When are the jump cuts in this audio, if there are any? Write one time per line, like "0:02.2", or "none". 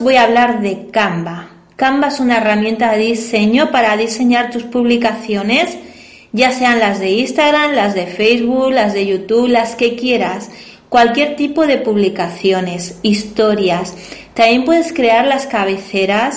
none